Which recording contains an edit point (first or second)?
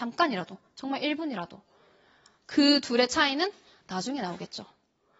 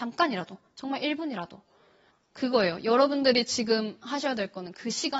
second